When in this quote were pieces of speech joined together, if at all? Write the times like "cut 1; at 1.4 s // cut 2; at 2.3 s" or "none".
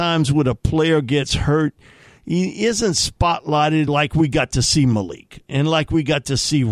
none